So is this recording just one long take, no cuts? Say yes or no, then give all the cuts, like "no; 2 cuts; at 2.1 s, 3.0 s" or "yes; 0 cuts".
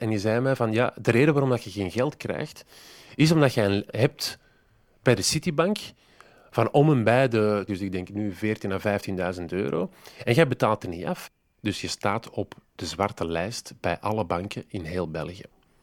no; 2 cuts; at 3.9 s, 7.7 s